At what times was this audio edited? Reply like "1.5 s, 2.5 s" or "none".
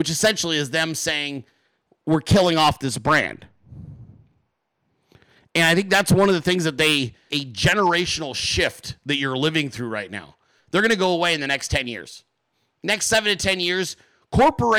7.3 s, 10.6 s